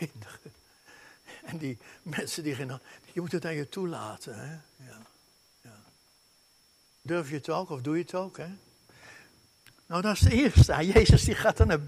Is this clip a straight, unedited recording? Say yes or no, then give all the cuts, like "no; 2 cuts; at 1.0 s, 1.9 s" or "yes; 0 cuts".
yes; 0 cuts